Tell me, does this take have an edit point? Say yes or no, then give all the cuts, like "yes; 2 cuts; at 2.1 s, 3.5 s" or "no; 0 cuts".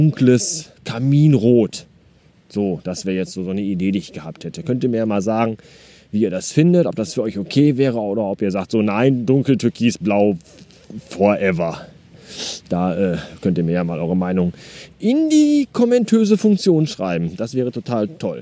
no; 0 cuts